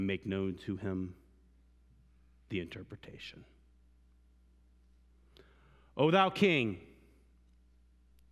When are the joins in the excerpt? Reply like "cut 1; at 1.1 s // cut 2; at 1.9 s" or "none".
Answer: none

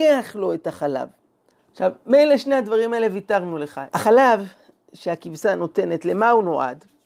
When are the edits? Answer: cut 1; at 1.5 s // cut 2; at 3.9 s

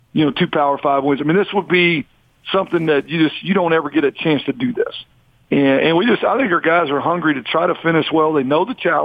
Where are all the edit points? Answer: none

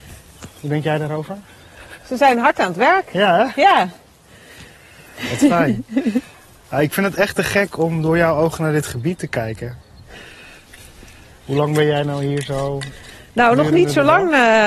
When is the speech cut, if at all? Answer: none

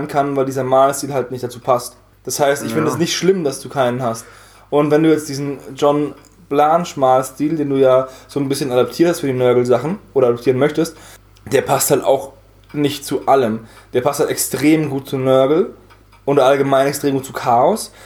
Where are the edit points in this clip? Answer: none

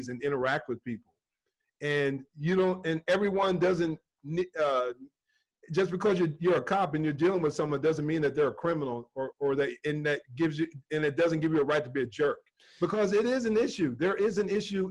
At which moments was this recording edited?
none

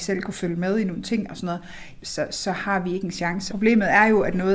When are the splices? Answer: cut 1; at 2.0 s // cut 2; at 3.5 s

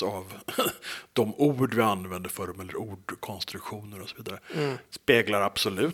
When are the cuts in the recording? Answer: cut 1; at 4.8 s

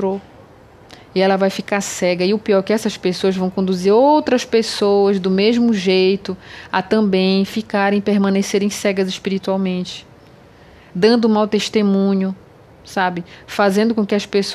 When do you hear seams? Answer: none

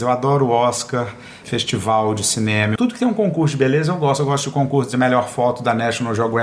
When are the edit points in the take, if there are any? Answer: cut 1; at 1.4 s // cut 2; at 2.8 s

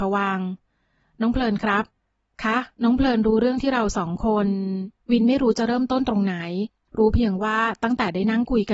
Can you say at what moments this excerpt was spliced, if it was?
cut 1; at 2.7 s // cut 2; at 5.0 s

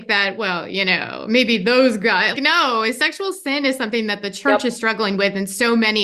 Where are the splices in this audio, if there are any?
cut 1; at 2.3 s

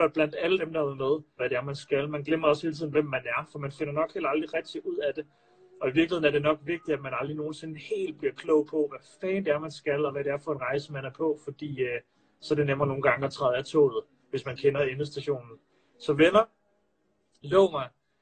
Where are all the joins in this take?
cut 1; at 1.4 s

